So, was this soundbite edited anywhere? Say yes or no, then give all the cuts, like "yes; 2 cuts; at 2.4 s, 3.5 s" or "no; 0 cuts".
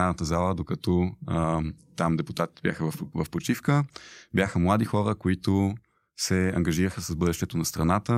no; 0 cuts